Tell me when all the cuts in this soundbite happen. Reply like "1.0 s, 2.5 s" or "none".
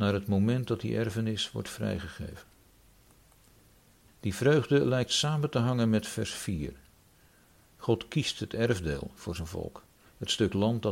4.1 s

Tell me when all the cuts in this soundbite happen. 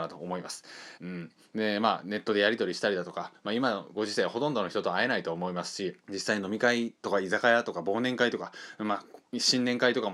1.0 s, 6.0 s

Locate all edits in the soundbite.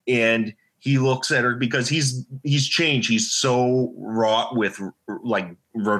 none

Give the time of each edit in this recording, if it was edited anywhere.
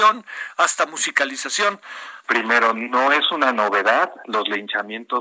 2.2 s

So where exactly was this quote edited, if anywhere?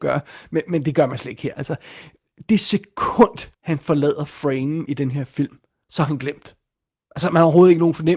1.5 s, 3.5 s

